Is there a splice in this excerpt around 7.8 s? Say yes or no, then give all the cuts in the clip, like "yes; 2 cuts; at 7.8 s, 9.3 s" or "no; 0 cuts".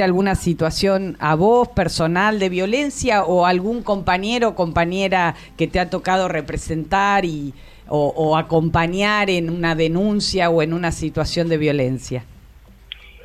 no; 0 cuts